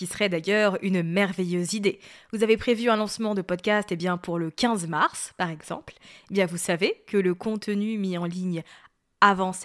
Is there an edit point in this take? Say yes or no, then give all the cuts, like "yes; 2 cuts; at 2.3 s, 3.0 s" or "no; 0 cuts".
no; 0 cuts